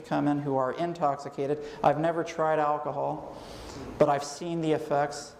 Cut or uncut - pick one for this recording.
uncut